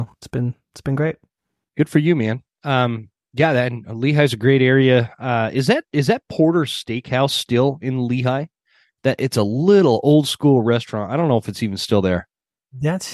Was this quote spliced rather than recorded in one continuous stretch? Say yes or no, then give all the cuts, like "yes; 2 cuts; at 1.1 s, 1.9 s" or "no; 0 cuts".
no; 0 cuts